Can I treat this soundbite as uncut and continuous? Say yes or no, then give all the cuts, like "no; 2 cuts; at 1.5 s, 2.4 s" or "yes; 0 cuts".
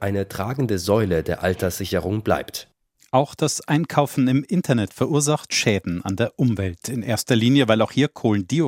yes; 0 cuts